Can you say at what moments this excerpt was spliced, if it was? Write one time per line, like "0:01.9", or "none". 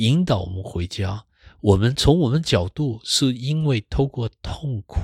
none